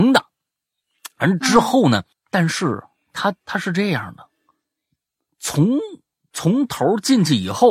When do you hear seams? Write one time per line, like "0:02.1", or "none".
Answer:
0:02.1